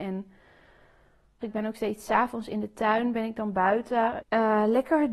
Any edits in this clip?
yes; 2 cuts; at 1.4 s, 4.2 s

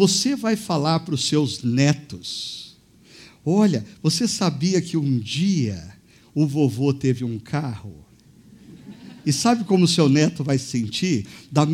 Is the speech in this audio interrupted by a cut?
no; 0 cuts

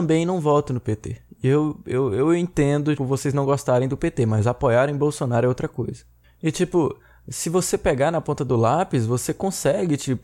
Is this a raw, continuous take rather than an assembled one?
no; 1 cut; at 3.0 s

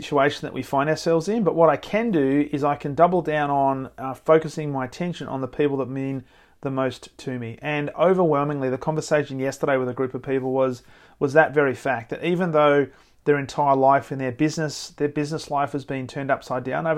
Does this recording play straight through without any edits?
yes; 0 cuts

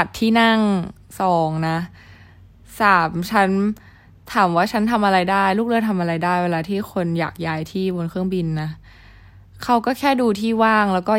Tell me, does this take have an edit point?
no; 0 cuts

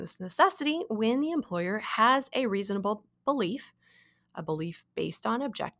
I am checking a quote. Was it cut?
no; 0 cuts

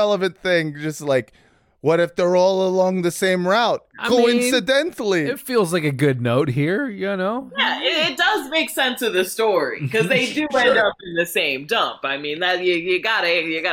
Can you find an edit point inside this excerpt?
no; 0 cuts

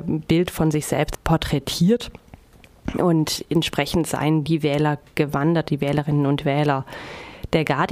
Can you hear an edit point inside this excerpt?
no; 0 cuts

